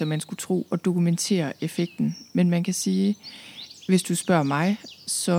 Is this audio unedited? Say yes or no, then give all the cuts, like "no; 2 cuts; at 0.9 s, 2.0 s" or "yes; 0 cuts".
yes; 0 cuts